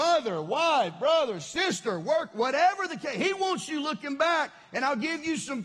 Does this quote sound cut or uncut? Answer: uncut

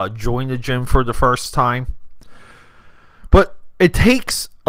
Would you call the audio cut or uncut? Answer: uncut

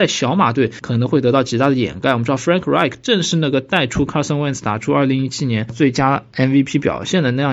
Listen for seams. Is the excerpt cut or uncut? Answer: uncut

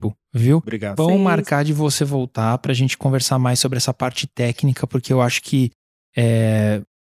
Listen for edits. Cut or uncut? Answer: cut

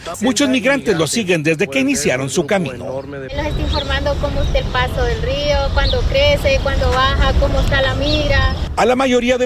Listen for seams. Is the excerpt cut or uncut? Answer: uncut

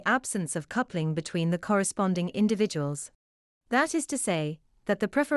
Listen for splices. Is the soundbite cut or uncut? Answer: cut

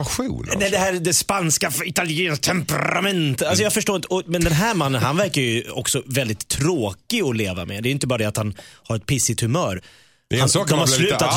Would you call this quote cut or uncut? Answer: uncut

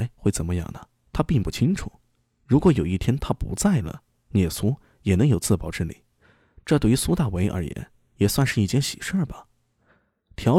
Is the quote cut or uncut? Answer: uncut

